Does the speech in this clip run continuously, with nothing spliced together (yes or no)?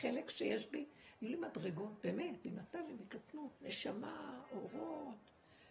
no